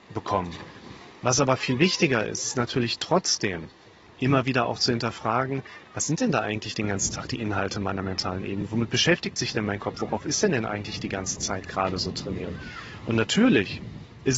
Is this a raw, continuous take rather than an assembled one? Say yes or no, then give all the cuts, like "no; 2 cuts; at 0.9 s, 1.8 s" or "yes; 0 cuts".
yes; 0 cuts